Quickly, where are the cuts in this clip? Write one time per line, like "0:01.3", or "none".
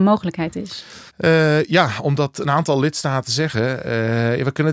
0:01.1